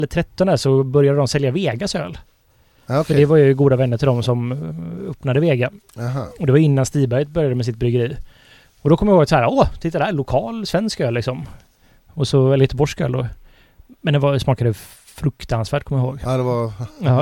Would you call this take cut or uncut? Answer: uncut